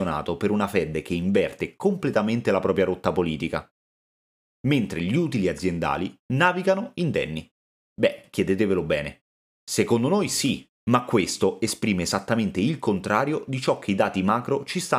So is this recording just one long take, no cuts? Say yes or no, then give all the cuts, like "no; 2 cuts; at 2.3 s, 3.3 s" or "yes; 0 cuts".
no; 2 cuts; at 4.6 s, 7.9 s